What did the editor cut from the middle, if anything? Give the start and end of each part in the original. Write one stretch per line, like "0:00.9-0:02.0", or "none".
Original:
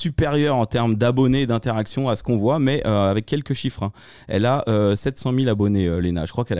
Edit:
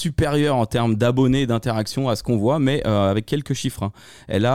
none